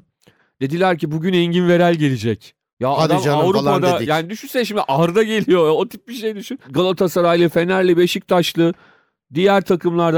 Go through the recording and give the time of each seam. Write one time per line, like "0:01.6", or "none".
0:06.6